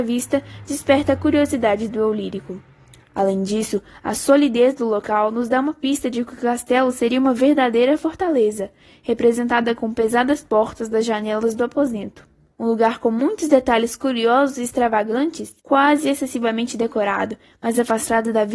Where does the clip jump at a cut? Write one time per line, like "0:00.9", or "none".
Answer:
0:12.5
0:15.6